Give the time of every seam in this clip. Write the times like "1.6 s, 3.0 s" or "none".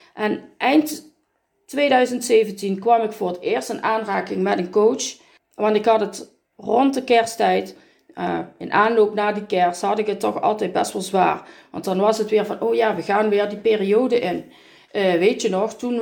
none

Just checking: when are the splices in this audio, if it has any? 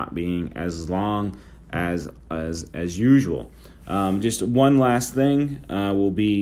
none

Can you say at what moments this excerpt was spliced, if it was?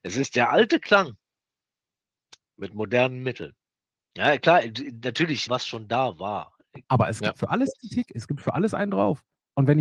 5.5 s, 6.8 s

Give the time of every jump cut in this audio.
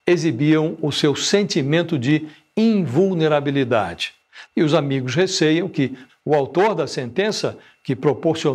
4.4 s, 6.1 s

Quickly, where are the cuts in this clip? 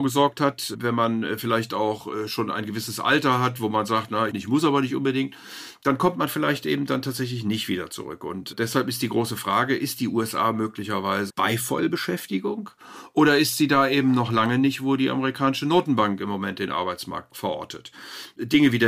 4.3 s, 11.3 s

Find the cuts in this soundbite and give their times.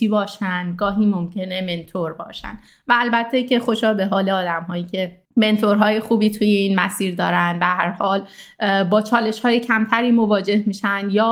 5.2 s

